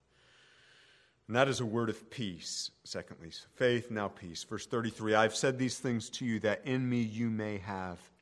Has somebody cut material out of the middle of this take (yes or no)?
no